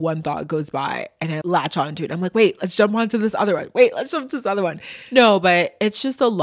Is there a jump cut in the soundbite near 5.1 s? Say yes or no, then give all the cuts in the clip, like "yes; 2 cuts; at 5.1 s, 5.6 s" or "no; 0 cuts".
no; 1 cut; at 1.4 s